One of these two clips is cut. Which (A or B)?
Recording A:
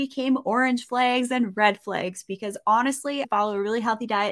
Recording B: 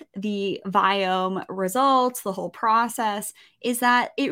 A